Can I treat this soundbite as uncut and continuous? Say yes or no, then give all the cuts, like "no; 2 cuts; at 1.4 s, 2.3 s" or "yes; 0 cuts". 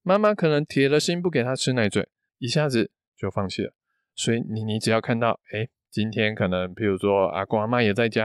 no; 1 cut; at 2.3 s